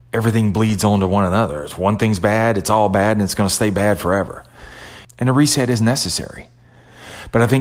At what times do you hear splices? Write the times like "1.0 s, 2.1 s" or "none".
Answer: 5.0 s

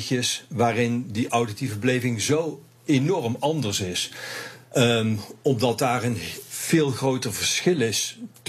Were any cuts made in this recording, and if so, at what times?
4.6 s

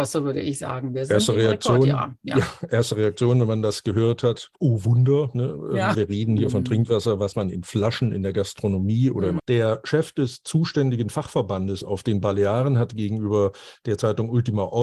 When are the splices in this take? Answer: 5.9 s, 9.4 s

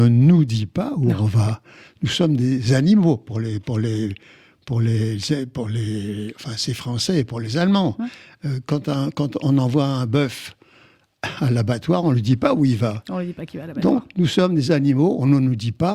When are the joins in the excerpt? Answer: none

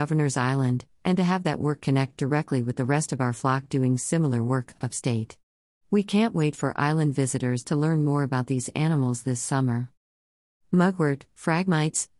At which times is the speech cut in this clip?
none

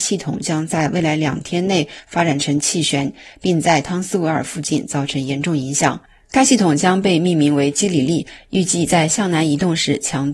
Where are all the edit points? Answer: none

